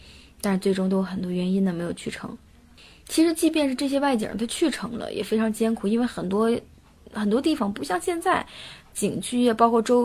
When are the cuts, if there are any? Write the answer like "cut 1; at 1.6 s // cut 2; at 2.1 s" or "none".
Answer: none

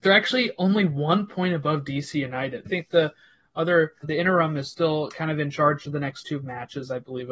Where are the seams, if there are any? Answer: cut 1; at 2.7 s // cut 2; at 4.0 s

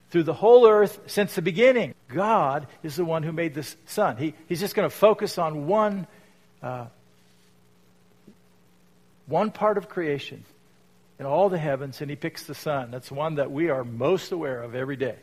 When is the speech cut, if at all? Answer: cut 1; at 1.9 s

